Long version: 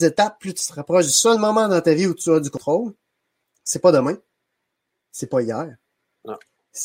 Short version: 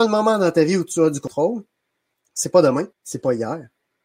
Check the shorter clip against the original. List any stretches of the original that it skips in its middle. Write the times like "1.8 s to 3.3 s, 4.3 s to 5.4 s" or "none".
4.2 s to 5.0 s